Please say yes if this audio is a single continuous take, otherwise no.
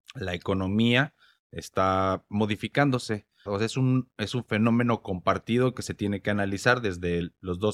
no